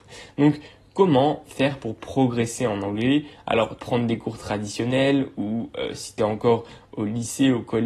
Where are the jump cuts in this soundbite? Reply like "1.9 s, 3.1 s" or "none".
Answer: 3.8 s